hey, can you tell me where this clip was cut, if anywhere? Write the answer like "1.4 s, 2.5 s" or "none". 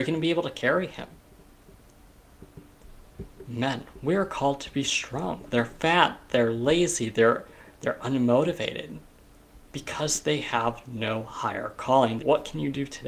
5.5 s, 12.2 s

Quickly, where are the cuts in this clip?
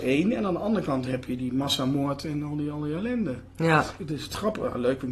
1.4 s, 4.0 s

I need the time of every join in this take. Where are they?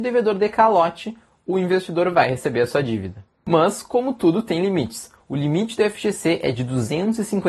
none

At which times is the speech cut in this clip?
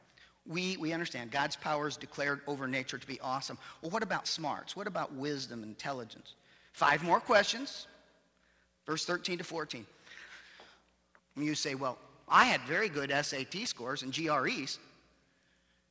11.2 s

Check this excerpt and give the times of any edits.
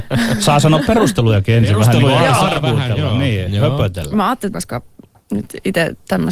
4.5 s

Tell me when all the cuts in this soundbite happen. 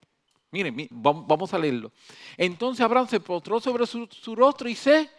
0.9 s

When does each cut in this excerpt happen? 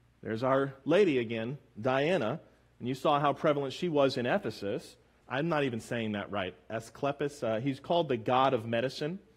5.2 s

